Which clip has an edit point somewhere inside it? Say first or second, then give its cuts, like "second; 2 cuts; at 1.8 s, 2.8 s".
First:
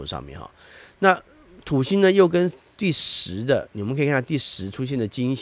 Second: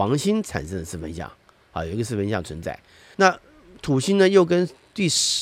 second; 1 cut; at 3.1 s